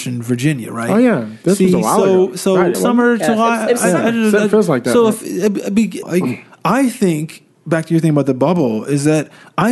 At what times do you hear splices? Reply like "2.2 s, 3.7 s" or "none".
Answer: 2.7 s, 6.0 s